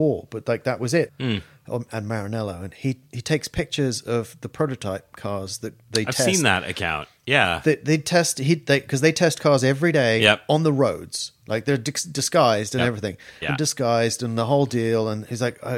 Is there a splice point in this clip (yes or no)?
yes